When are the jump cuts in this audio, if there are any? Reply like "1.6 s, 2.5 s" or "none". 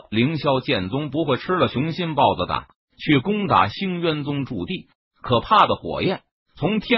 5.1 s